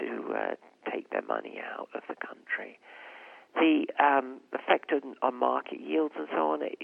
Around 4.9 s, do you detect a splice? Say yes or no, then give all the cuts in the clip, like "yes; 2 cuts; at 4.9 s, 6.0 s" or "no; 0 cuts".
no; 1 cut; at 3.5 s